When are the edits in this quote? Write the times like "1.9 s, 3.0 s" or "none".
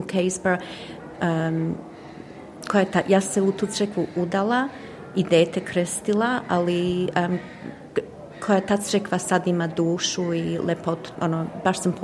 1.1 s, 11.1 s